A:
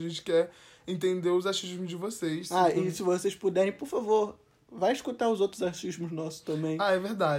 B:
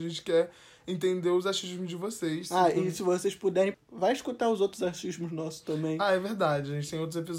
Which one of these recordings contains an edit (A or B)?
B